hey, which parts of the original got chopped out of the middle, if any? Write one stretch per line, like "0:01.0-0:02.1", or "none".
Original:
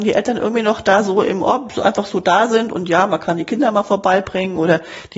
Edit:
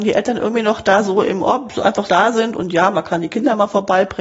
0:02.1-0:02.2